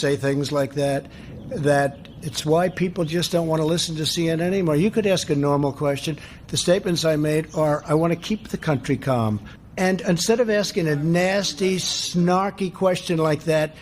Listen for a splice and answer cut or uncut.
cut